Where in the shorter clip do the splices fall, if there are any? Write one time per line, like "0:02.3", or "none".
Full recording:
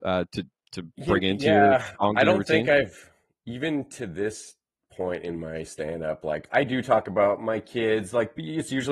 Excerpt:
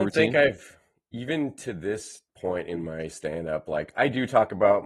0:02.3